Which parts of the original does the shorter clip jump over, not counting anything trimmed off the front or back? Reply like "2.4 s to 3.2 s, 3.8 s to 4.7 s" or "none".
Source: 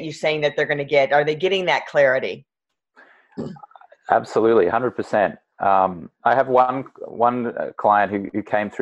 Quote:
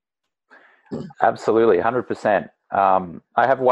3.6 s to 4.0 s